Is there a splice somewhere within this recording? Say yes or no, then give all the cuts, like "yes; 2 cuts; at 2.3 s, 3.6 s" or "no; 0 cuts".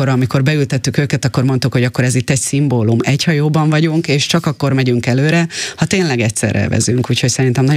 no; 0 cuts